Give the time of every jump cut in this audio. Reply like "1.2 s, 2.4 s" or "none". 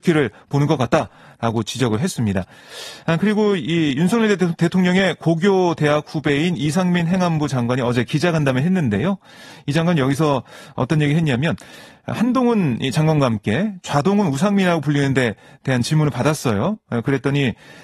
none